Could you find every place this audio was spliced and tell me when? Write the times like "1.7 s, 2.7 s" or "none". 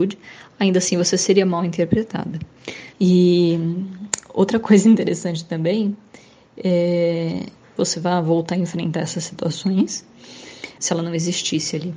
2.9 s, 7.8 s, 10.8 s